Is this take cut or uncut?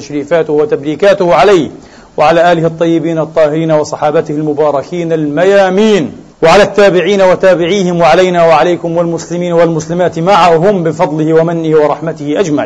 cut